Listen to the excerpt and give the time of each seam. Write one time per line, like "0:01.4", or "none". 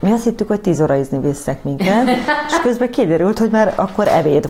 none